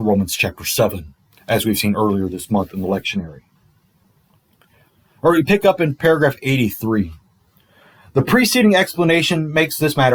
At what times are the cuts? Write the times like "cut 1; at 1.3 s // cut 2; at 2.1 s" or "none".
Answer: none